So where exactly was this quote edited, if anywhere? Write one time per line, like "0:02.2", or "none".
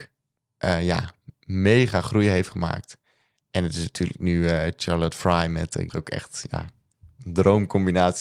0:05.9

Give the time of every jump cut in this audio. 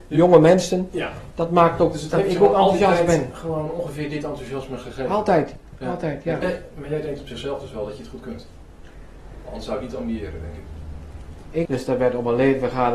0:06.4
0:11.7

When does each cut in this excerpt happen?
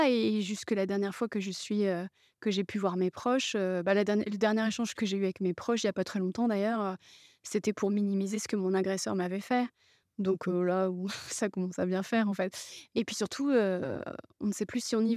none

